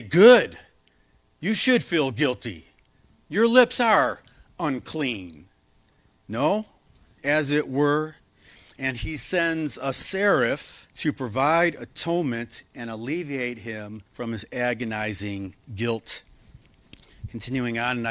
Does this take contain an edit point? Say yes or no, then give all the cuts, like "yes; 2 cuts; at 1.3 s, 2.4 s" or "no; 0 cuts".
yes; 3 cuts; at 7.2 s, 10.9 s, 14.1 s